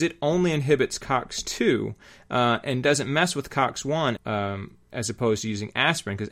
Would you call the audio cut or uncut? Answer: cut